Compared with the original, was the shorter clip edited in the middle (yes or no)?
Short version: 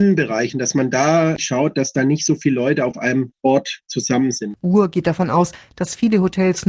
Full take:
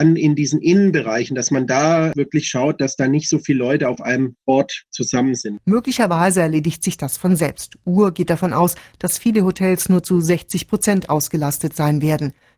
yes